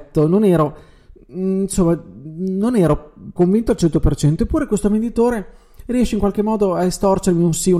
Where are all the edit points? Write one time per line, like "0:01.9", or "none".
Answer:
0:03.4